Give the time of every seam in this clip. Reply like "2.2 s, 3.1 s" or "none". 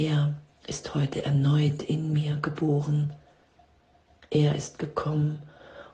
4.2 s